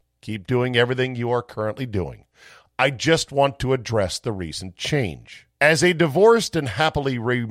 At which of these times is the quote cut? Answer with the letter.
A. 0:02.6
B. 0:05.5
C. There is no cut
B